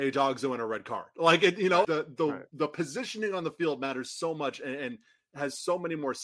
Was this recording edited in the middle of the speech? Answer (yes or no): yes